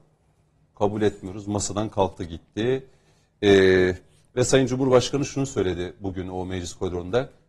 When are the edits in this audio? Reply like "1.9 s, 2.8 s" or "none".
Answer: none